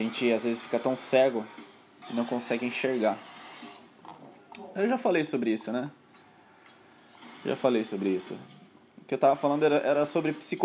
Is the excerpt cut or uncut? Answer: uncut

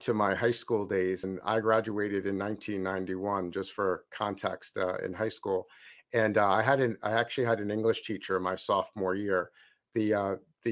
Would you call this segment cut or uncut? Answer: cut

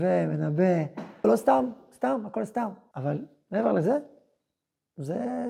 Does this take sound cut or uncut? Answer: cut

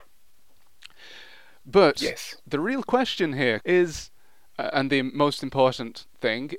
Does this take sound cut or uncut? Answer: cut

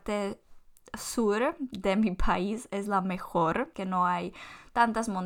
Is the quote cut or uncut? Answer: cut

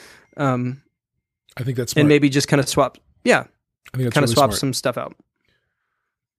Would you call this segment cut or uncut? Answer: uncut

